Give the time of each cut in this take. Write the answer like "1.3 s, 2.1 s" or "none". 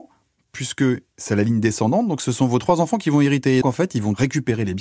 3.6 s